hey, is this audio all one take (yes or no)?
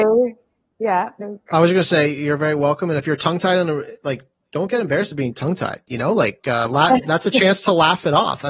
no